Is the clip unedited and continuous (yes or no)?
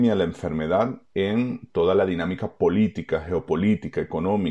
yes